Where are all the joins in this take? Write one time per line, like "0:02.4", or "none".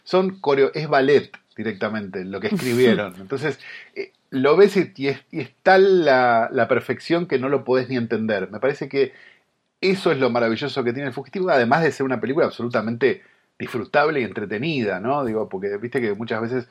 none